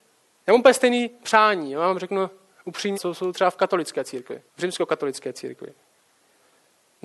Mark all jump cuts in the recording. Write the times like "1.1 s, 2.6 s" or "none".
2.9 s, 4.5 s